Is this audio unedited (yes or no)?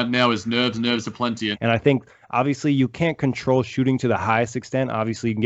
no